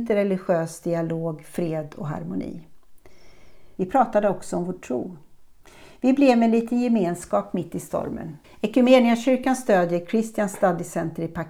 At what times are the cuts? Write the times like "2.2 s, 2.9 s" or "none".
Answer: 3.8 s, 8.4 s